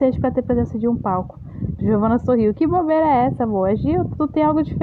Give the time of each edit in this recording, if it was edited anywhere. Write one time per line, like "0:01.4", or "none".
0:01.8